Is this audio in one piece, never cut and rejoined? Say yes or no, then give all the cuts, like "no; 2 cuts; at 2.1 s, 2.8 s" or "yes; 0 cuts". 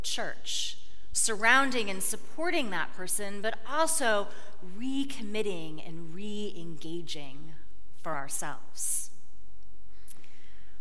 no; 1 cut; at 1.1 s